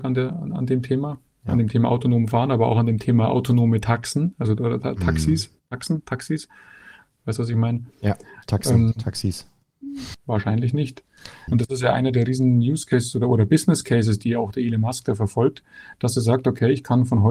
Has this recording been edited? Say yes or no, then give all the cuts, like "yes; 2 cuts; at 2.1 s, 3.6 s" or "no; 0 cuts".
yes; 2 cuts; at 10.1 s, 11.5 s